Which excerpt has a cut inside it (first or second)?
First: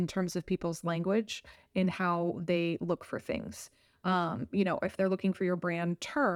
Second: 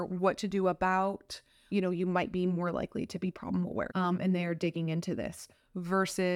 second